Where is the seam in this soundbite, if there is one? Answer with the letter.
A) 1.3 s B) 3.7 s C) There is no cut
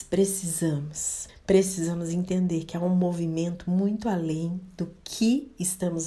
A